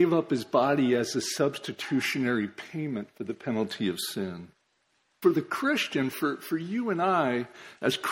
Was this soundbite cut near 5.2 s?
yes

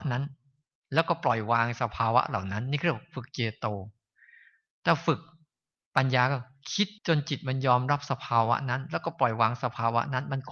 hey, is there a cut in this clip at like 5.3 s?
no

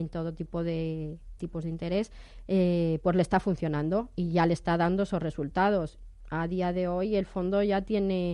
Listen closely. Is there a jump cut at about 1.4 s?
yes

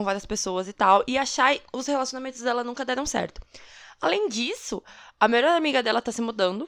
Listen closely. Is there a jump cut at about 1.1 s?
no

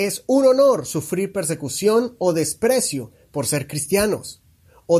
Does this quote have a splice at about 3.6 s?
no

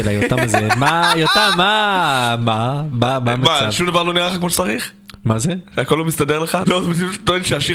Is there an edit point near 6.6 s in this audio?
yes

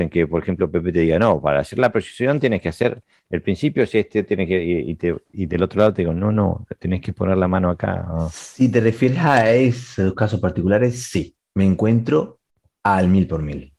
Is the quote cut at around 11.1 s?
no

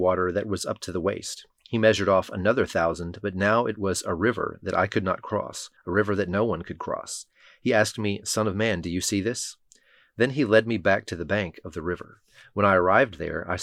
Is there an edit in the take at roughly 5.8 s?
yes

